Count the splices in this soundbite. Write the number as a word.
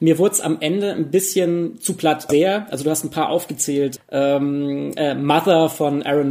two